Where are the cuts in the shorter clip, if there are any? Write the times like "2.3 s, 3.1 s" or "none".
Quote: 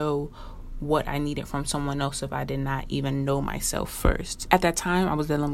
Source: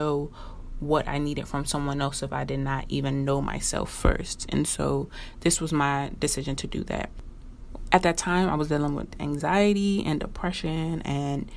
4.5 s